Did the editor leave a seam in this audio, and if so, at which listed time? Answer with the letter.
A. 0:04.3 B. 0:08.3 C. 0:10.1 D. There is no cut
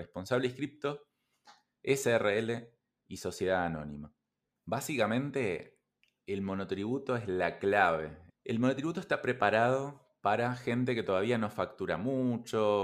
B